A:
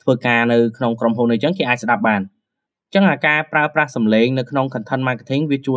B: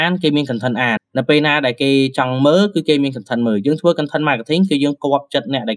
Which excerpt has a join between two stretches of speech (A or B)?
B